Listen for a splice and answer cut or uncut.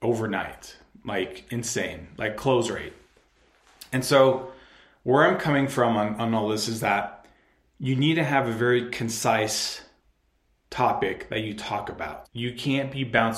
cut